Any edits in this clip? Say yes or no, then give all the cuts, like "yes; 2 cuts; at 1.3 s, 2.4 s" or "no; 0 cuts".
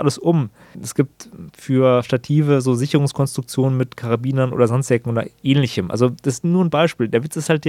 no; 0 cuts